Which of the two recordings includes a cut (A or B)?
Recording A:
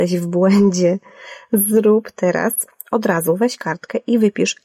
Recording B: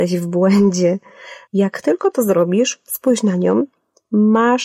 B